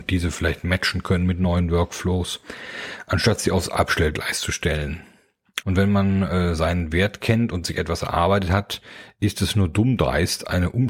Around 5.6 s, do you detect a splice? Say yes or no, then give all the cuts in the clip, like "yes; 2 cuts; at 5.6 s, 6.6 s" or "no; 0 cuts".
yes; 1 cut; at 5.6 s